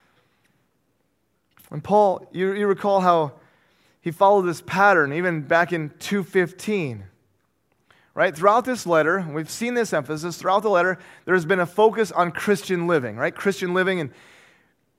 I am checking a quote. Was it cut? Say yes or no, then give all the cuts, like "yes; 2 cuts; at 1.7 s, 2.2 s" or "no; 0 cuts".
no; 0 cuts